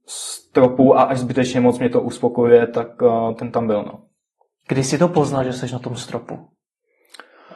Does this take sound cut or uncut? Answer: uncut